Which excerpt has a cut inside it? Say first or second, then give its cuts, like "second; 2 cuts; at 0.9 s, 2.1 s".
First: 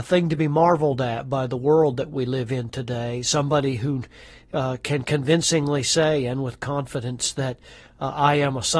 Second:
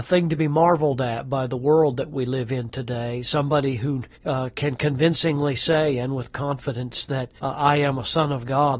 second; 2 cuts; at 4.1 s, 7.4 s